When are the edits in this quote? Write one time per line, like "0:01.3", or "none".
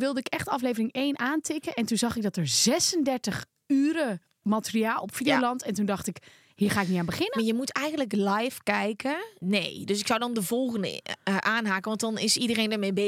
0:09.4